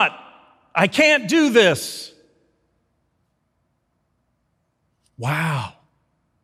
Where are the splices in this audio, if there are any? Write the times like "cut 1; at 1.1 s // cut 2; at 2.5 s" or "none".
none